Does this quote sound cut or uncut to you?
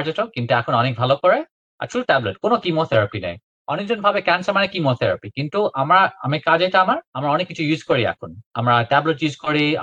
cut